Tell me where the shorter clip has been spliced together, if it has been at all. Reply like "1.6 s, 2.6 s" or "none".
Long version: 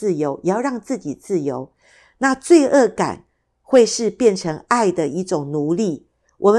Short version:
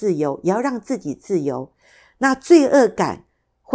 none